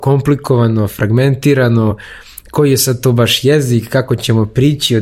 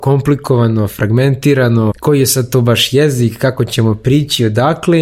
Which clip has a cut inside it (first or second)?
second